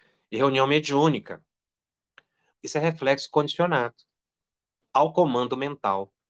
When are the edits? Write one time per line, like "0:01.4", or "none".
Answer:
0:02.5

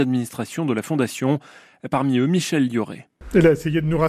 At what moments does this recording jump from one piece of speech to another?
none

